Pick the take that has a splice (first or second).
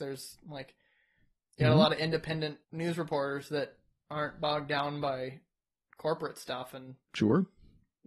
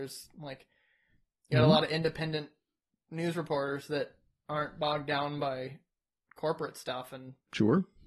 first